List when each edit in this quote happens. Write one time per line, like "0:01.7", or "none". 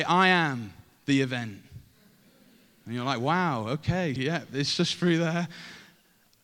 0:04.2